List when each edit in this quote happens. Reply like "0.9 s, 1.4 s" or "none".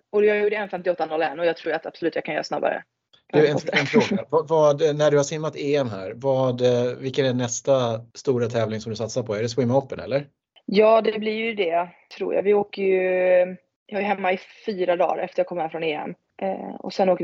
none

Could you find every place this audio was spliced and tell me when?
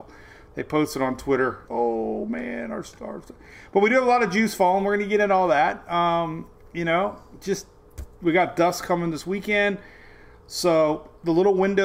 1.6 s

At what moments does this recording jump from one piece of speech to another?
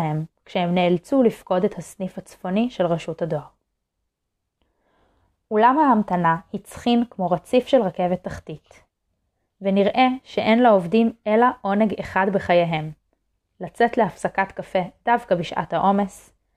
none

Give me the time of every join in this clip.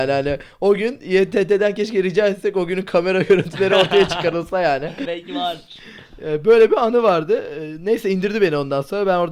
5.1 s

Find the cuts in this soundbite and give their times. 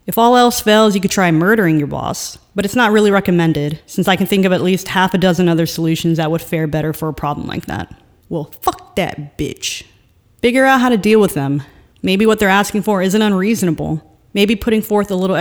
8.2 s

